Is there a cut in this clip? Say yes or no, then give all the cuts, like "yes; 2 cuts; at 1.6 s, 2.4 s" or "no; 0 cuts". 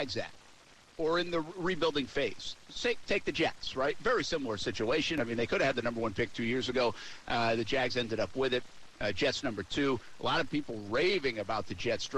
no; 0 cuts